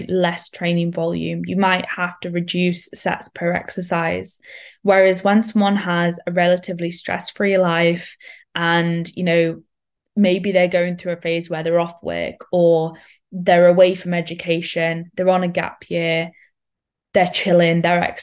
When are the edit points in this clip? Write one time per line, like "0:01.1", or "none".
none